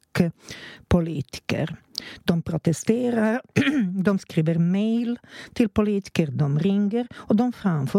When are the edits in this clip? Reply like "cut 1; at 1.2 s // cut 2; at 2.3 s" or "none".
none